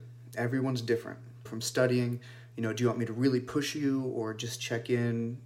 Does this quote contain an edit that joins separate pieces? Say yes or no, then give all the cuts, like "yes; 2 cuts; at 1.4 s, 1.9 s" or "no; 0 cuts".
yes; 1 cut; at 1.5 s